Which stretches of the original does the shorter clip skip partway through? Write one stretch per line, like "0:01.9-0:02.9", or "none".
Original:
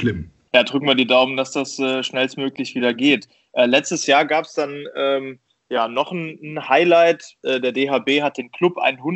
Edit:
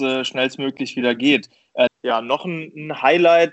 0:03.7-0:05.5

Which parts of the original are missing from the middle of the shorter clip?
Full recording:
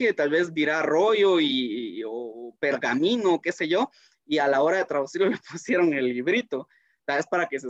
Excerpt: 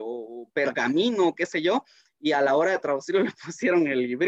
none

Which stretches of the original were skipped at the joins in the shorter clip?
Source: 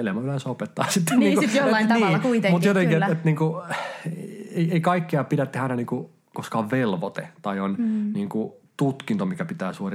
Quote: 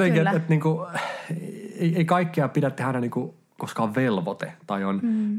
none

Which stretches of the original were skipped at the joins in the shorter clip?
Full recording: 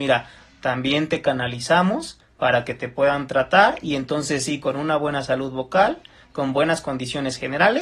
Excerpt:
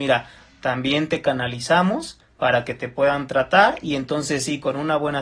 none

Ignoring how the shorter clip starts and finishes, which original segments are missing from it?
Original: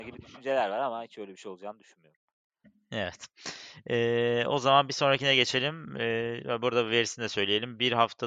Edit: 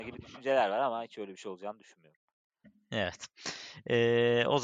none

